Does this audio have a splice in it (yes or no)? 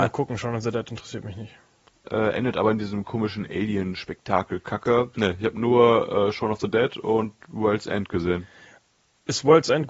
yes